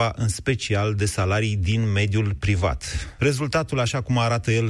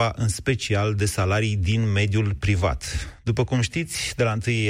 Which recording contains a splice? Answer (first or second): first